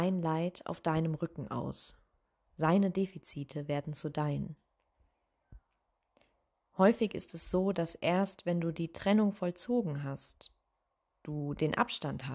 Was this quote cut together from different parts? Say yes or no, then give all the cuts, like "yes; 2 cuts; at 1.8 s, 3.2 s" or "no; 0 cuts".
no; 0 cuts